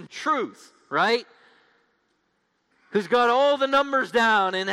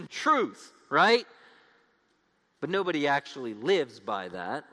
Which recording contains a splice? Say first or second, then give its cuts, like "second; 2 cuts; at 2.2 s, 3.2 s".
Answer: second; 1 cut; at 2.5 s